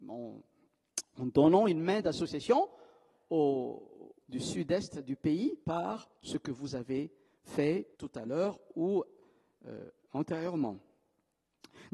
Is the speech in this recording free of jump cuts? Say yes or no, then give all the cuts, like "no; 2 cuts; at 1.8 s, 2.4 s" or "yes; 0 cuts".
no; 3 cuts; at 4.2 s, 5.6 s, 7.9 s